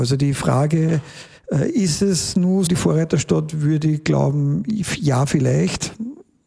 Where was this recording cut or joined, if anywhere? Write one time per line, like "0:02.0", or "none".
0:02.7